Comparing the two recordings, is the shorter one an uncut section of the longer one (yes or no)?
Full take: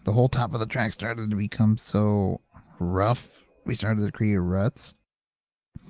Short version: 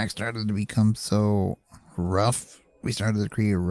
yes